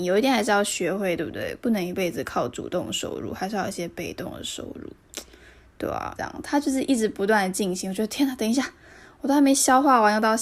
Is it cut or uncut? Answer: cut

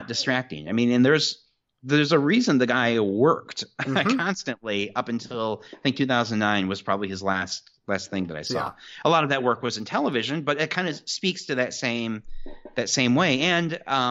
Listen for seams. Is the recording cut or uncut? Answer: uncut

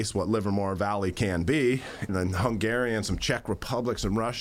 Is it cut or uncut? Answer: cut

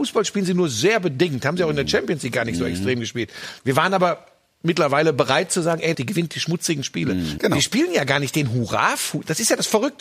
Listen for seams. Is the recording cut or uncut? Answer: cut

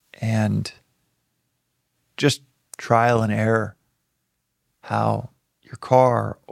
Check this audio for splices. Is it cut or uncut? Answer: uncut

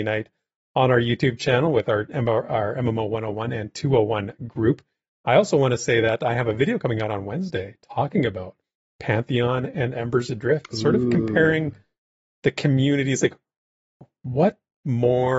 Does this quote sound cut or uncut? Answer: uncut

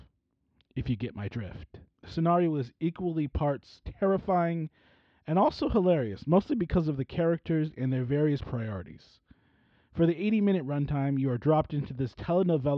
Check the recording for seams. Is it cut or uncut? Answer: cut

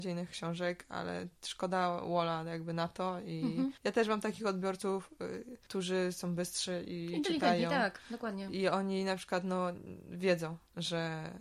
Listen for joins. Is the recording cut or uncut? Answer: uncut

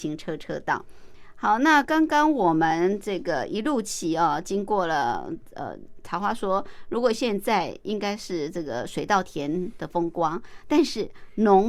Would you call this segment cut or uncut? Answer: uncut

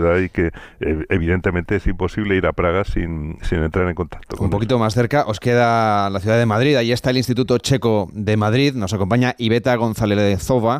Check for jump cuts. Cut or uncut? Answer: uncut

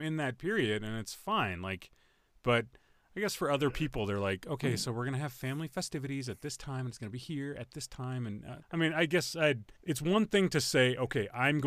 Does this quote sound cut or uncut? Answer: cut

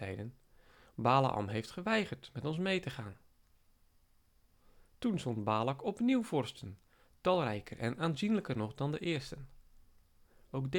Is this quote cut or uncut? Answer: uncut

